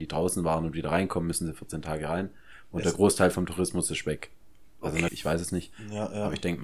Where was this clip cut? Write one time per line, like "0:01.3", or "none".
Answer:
0:05.1